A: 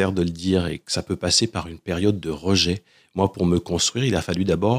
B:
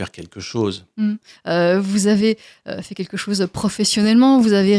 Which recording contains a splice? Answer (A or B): B